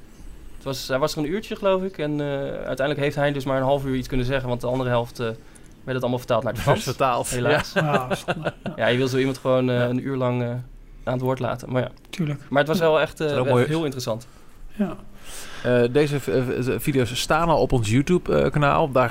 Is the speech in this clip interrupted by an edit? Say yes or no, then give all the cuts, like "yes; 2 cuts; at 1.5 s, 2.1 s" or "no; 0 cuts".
no; 0 cuts